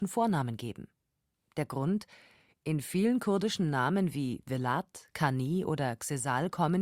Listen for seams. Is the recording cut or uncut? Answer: uncut